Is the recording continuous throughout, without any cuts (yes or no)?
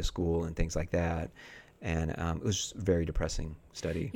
yes